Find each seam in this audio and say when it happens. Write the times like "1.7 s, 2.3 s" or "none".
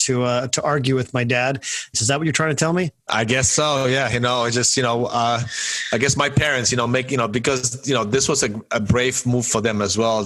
1.9 s